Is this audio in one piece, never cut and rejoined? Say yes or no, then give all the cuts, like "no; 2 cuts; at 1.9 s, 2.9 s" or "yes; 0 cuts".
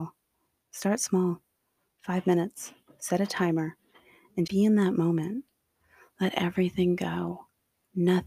no; 1 cut; at 4.5 s